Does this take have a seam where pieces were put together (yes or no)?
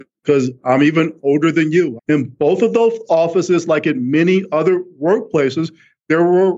yes